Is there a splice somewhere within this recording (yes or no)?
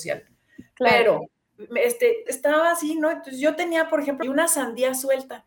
yes